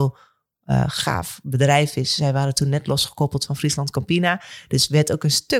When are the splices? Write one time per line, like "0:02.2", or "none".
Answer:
none